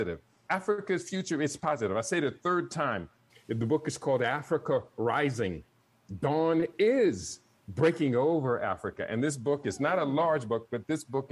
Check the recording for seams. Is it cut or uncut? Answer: cut